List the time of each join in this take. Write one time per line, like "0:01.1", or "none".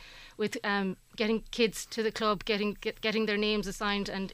none